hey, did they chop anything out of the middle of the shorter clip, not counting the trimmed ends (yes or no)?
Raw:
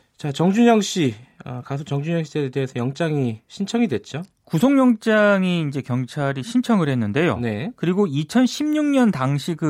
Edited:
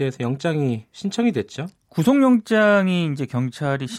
no